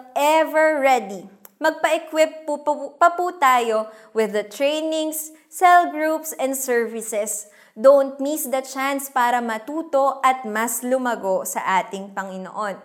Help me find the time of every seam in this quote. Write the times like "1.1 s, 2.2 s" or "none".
none